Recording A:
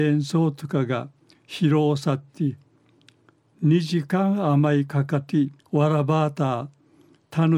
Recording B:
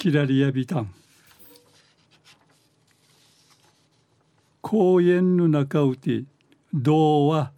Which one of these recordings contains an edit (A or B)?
A